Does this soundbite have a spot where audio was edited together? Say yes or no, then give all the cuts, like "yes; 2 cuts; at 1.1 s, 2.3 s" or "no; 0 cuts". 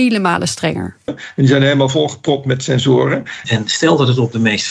yes; 2 cuts; at 1.1 s, 3.4 s